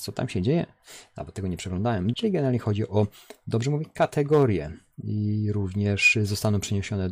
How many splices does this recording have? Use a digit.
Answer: 1